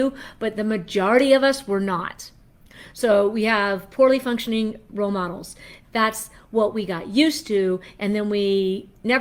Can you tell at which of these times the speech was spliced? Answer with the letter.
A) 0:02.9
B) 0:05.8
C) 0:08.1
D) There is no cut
B